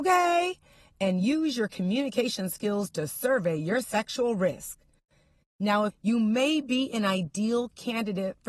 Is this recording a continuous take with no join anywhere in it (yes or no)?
no